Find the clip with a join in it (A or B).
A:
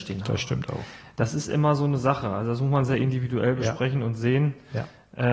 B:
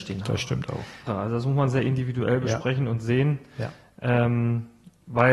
B